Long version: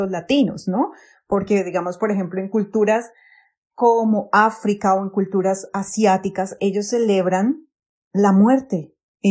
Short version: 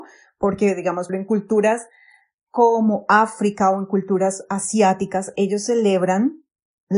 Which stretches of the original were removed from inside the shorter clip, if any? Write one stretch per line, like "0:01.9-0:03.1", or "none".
0:02.0-0:02.3

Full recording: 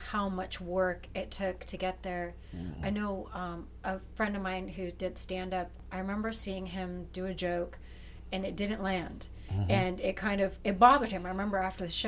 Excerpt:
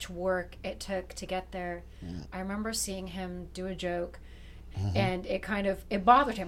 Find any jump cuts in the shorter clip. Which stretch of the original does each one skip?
0:02.8-0:05.8
0:08.3-0:09.4

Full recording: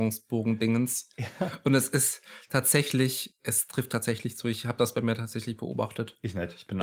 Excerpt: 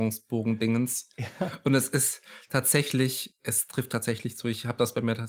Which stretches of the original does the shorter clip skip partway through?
none

